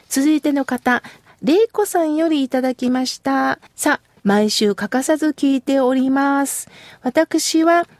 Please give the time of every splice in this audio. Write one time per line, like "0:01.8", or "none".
0:03.7